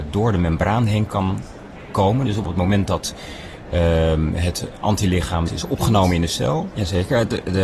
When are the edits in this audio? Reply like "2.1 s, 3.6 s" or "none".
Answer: 5.5 s, 6.7 s